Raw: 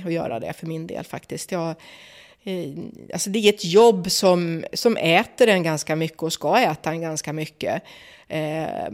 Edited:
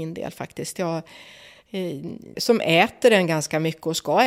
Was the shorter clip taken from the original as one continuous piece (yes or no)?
no